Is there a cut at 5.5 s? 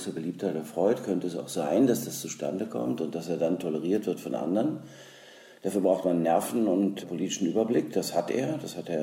no; 1 cut; at 7.0 s

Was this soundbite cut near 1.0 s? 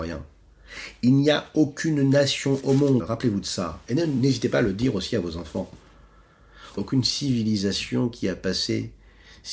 no; 2 cuts; at 3.0 s, 6.8 s

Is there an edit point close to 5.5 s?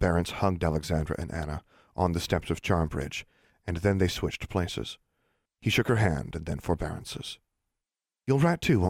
yes; 1 cut; at 5.5 s

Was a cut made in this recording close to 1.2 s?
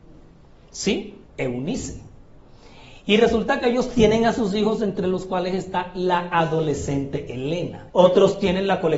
yes; 2 cuts; at 1.2 s, 7.9 s

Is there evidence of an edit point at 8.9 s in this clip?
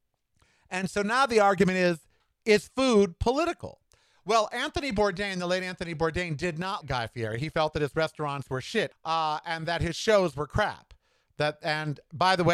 yes; 2 cuts; at 6.8 s, 8.9 s

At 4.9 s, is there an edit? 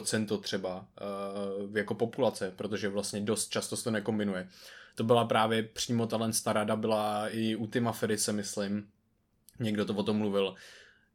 no; 0 cuts

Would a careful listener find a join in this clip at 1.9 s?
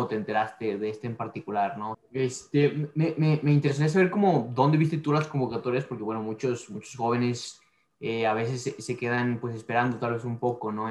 yes; 1 cut; at 1.9 s

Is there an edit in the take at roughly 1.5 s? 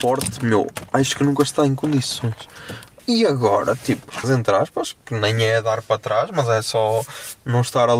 no; 2 cuts; at 3.0 s, 4.2 s

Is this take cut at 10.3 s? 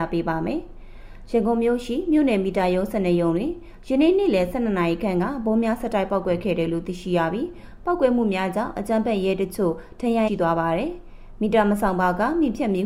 yes; 1 cut; at 10.3 s

